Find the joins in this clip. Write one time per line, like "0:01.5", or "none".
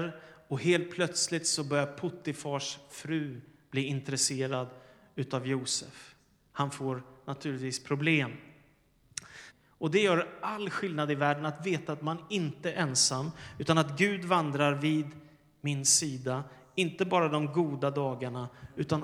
0:09.5